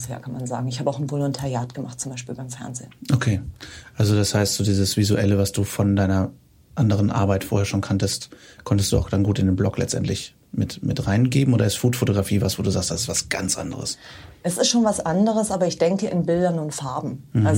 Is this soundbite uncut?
yes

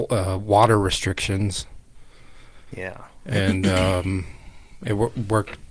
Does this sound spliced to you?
yes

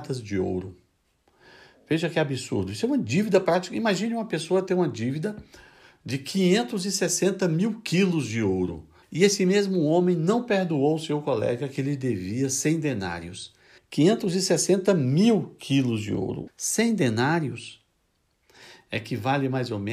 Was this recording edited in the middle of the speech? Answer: yes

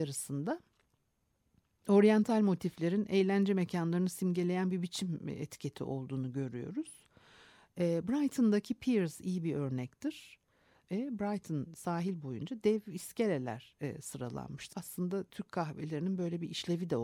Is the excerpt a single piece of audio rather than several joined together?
no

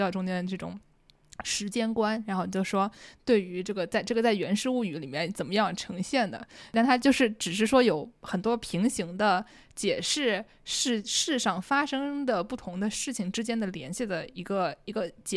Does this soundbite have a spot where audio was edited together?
no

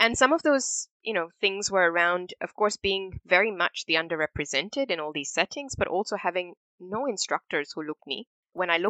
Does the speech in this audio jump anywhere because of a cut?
yes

